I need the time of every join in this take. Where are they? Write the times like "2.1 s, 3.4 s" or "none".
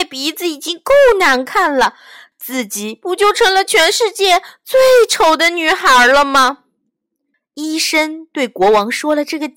2.3 s, 7.3 s

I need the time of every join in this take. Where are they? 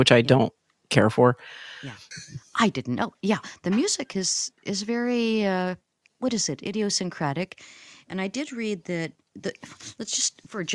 2.1 s

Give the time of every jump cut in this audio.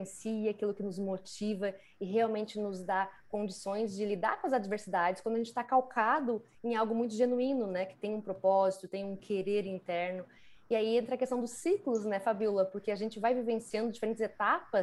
none

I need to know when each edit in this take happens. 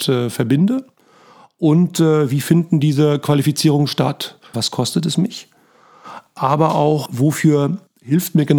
4.5 s

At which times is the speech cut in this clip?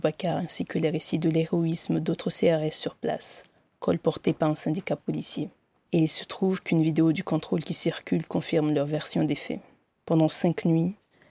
5.7 s

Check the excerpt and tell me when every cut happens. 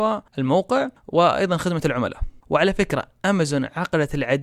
2.4 s

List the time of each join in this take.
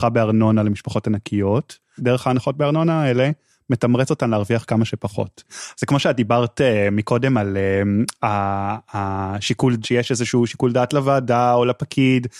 2.0 s, 5.7 s, 9.8 s

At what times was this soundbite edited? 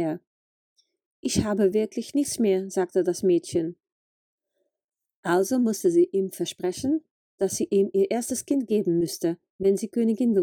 none

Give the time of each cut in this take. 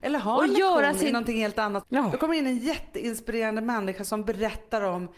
1.8 s

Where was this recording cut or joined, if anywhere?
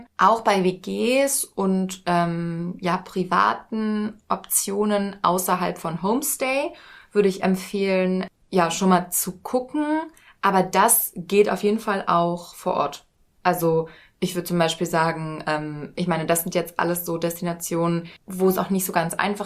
18.2 s

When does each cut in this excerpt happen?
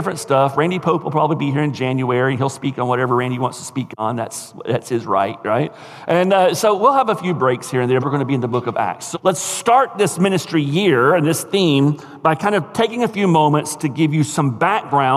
8.0 s, 9.1 s

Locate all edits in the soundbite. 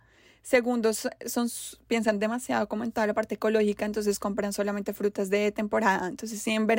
none

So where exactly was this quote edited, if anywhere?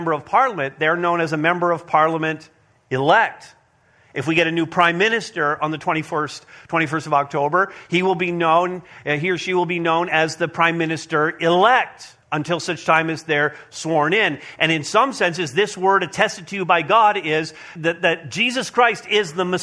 12.2 s, 17.8 s

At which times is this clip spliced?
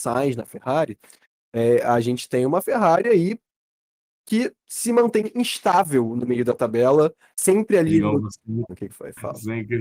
8.7 s

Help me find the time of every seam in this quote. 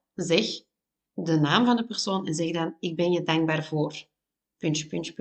none

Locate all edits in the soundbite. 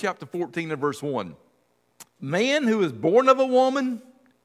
2.1 s

